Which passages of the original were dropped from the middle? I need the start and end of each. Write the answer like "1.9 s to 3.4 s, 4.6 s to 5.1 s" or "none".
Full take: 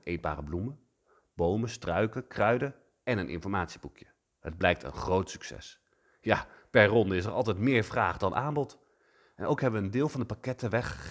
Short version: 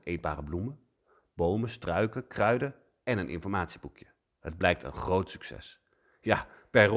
none